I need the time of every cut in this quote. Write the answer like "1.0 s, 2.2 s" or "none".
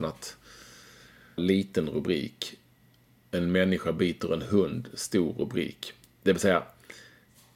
1.4 s